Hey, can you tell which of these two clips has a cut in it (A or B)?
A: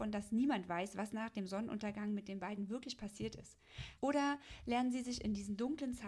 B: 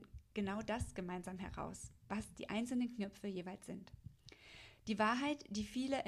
A